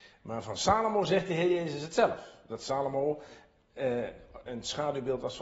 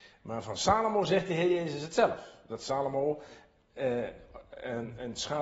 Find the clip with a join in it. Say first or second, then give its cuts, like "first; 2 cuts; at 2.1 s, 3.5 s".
first; 1 cut; at 4.5 s